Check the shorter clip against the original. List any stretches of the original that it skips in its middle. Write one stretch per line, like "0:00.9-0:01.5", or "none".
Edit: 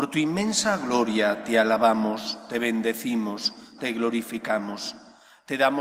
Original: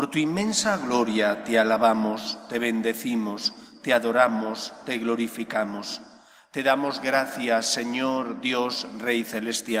0:03.8-0:04.8